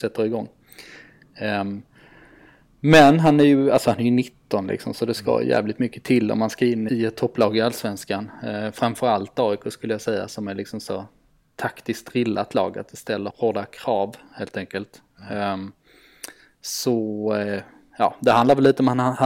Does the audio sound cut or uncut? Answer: cut